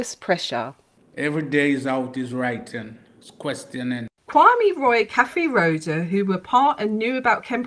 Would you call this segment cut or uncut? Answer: cut